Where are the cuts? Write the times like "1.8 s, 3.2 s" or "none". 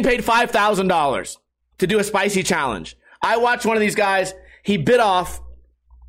none